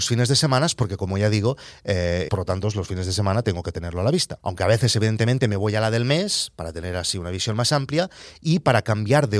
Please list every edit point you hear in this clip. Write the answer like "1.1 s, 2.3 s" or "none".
2.3 s, 4.4 s